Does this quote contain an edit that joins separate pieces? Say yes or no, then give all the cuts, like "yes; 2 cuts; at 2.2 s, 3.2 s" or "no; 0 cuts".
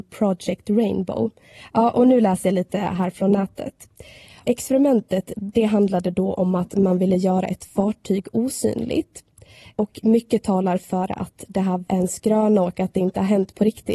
no; 0 cuts